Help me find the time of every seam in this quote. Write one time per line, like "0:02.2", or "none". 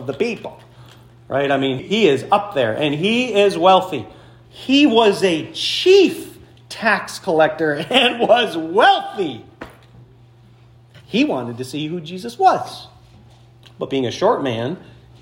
0:01.8
0:04.5